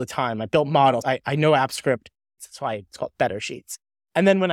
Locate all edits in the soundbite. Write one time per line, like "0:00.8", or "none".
0:01.0
0:02.4

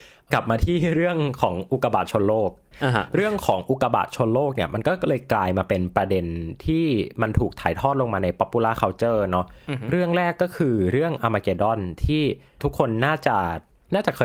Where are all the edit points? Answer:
none

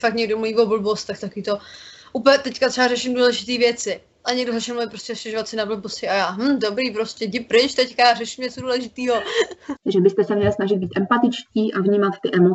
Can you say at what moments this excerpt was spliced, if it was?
0:01.2
0:09.8

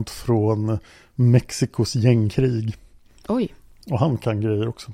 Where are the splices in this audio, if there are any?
none

